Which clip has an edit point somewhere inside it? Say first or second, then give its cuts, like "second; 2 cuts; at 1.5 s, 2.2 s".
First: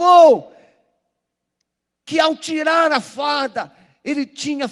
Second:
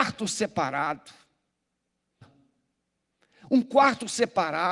second; 1 cut; at 2.2 s